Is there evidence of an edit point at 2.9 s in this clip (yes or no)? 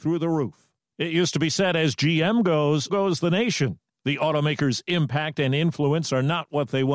yes